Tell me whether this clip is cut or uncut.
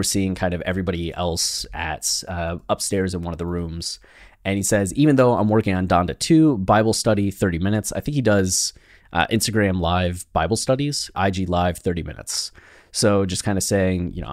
cut